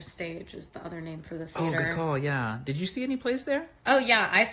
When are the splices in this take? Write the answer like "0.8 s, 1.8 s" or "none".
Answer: none